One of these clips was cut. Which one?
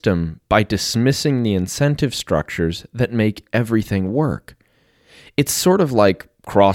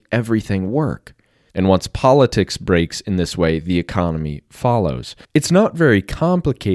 second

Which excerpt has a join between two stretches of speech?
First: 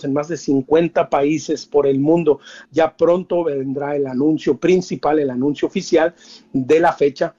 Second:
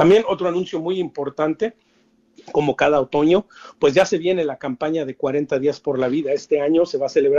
first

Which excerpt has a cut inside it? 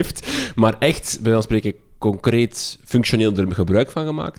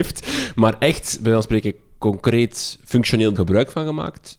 second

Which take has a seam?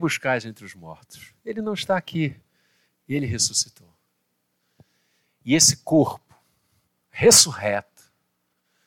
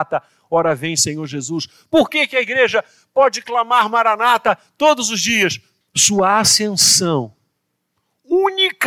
second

